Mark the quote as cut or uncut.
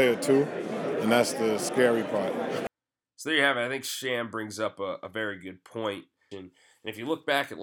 cut